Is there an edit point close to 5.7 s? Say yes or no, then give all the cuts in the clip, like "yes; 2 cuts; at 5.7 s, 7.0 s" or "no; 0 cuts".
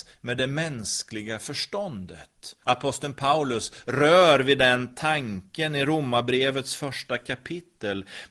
no; 1 cut; at 2.6 s